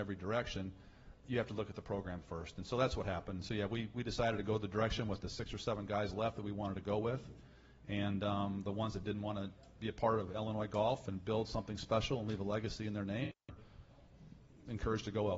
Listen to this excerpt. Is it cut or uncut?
uncut